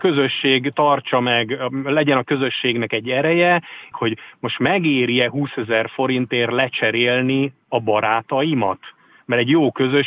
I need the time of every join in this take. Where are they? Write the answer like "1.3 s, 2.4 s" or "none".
3.9 s